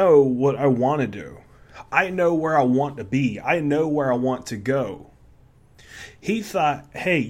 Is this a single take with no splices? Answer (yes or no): yes